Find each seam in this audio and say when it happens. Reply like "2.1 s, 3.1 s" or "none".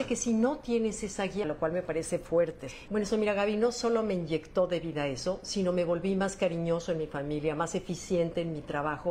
1.4 s, 2.9 s